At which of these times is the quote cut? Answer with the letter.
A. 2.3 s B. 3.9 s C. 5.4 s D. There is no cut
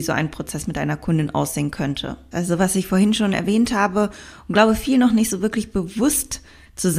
A